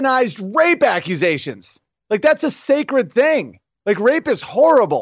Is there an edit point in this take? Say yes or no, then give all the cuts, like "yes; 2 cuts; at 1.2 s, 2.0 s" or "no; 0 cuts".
no; 0 cuts